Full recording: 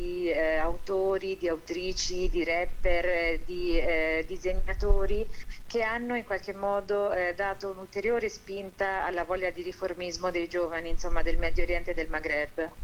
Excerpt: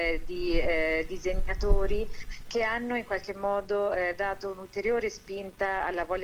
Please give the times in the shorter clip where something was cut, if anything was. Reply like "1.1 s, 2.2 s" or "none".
none